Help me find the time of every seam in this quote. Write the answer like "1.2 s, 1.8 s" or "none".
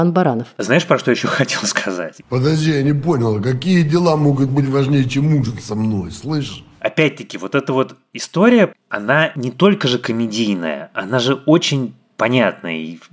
2.2 s